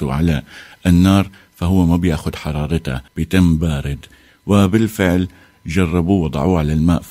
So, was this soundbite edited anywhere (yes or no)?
yes